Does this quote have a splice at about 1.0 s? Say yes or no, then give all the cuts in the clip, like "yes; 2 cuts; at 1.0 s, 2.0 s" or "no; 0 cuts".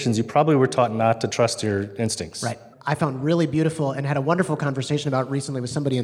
no; 1 cut; at 2.7 s